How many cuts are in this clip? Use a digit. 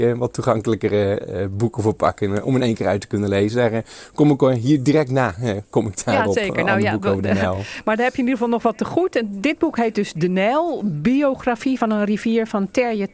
0